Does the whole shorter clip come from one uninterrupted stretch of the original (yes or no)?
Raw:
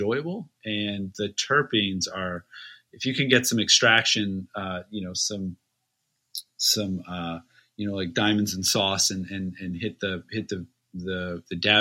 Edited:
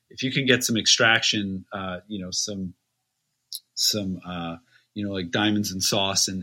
yes